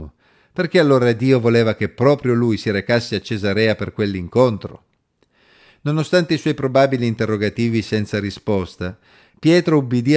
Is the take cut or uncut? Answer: uncut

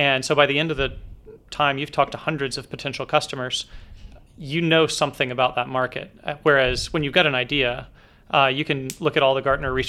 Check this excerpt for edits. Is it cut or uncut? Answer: uncut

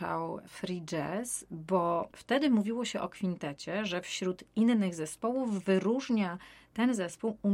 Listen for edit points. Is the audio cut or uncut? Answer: uncut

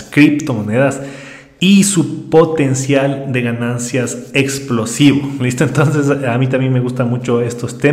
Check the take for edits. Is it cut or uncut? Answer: uncut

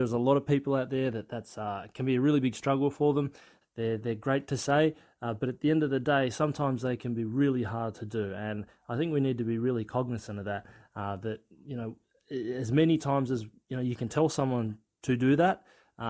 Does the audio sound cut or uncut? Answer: cut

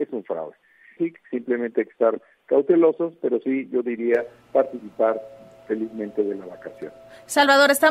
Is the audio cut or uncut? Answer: cut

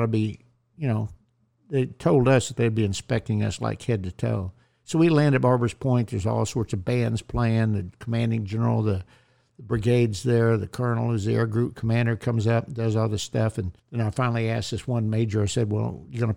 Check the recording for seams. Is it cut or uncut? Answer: cut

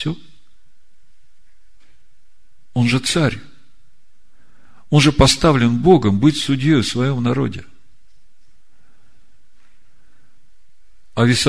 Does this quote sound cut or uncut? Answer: uncut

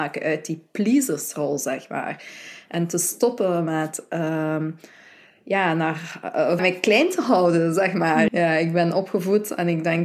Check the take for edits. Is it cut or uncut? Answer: cut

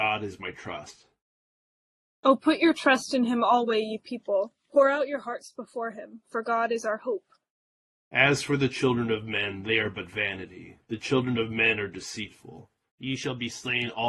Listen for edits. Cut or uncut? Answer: cut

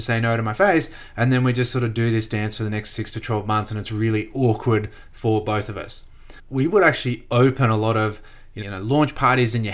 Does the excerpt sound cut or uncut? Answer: cut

